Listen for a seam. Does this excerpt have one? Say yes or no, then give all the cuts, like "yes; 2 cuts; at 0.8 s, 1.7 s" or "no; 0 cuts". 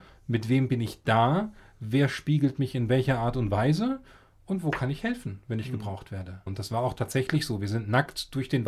yes; 1 cut; at 6.5 s